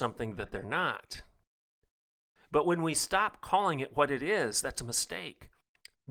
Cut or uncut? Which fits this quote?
uncut